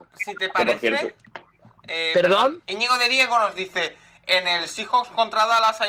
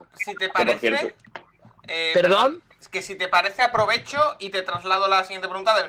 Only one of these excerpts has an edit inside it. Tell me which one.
first; 1 cut; at 2.7 s

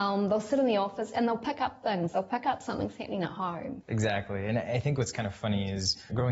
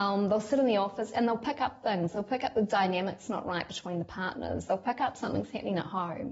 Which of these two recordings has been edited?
first; 2 cuts; at 2.1 s, 3.8 s

